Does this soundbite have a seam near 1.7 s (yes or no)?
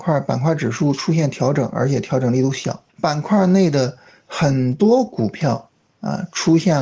no